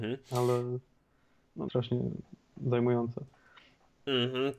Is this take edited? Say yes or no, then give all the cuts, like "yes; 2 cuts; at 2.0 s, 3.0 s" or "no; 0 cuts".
yes; 1 cut; at 1.7 s